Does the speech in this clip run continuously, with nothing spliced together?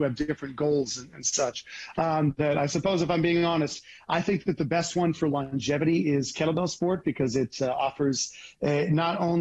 yes; 0 cuts

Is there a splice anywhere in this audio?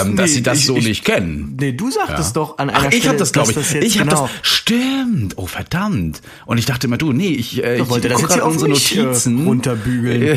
no; 0 cuts

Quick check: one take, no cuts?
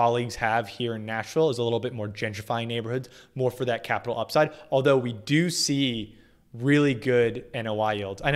yes; 0 cuts

